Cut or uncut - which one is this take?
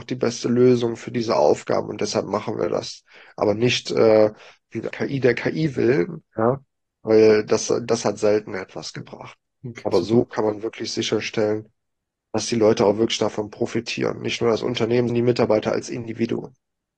cut